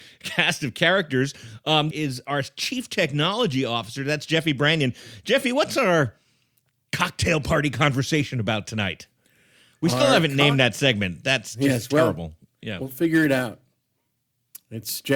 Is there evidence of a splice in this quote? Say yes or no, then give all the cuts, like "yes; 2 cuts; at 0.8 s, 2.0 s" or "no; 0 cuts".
yes; 1 cut; at 1.9 s